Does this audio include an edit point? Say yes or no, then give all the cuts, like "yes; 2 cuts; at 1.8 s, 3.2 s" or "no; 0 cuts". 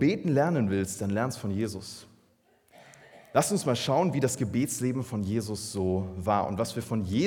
no; 0 cuts